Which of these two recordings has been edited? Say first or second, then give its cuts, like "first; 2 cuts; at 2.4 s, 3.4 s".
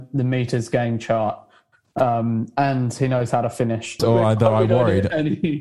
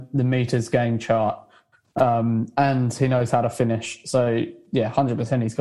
first; 1 cut; at 4.0 s